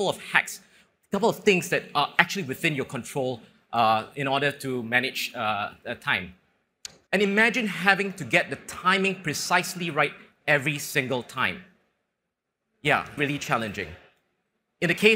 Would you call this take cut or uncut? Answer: cut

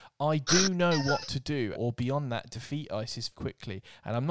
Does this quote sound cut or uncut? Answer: cut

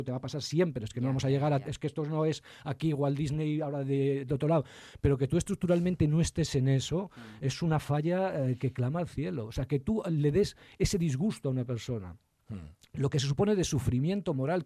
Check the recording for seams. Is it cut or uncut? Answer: uncut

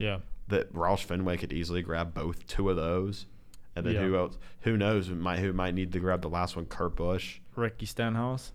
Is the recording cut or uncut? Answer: uncut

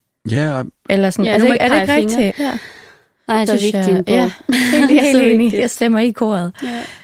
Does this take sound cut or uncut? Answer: cut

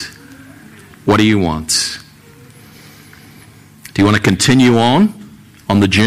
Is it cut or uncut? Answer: uncut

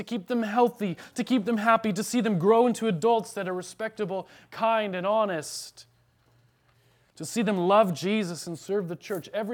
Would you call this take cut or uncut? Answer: uncut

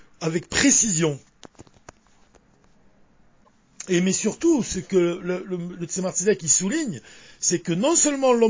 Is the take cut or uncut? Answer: uncut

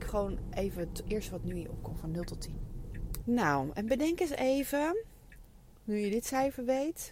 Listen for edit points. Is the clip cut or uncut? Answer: cut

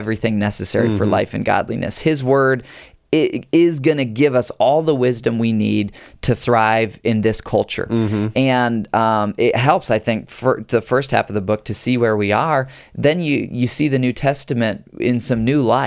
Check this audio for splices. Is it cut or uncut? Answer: uncut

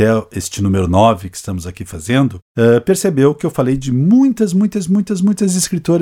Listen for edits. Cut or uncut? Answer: uncut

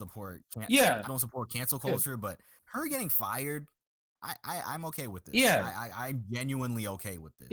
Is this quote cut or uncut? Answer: cut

